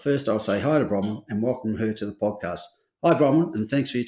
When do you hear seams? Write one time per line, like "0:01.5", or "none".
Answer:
none